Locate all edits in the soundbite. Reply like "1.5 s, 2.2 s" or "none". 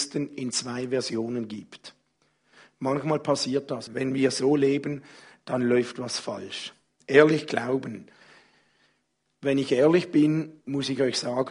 3.9 s